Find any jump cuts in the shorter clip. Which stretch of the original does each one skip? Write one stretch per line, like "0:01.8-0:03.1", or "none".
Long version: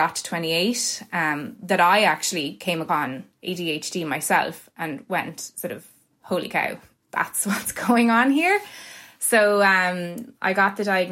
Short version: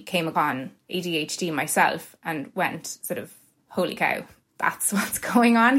none